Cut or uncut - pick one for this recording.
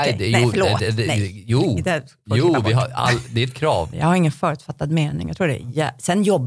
cut